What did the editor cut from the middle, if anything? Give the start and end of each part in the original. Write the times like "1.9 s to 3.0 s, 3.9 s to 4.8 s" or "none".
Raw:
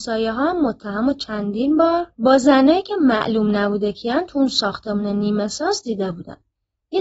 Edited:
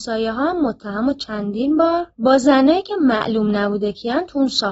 none